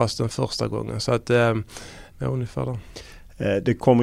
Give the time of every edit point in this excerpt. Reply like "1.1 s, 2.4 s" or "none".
2.1 s